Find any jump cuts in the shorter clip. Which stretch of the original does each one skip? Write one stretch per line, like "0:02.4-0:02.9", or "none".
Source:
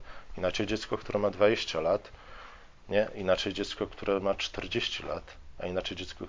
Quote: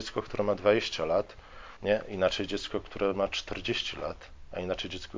0:02.5-0:02.8